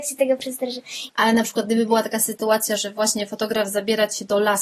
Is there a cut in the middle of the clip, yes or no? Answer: yes